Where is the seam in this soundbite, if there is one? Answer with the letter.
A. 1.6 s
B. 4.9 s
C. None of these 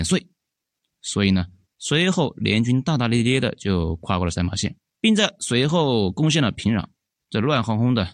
B